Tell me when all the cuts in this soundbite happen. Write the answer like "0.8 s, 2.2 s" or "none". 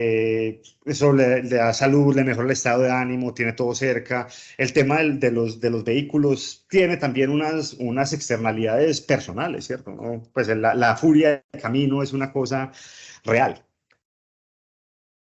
none